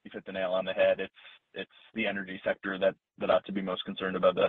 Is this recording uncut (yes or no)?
yes